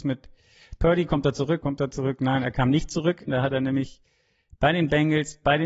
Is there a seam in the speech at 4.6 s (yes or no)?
no